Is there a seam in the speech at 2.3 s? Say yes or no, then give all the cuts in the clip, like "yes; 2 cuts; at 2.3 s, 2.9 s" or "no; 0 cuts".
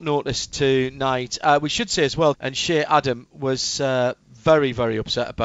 yes; 1 cut; at 2.3 s